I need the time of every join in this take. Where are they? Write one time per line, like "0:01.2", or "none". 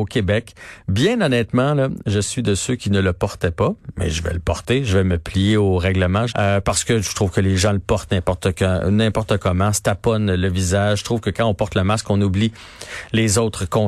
0:06.3